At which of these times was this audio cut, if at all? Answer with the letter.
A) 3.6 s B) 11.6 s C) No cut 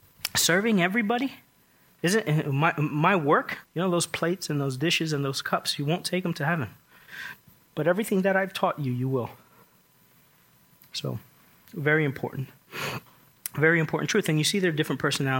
A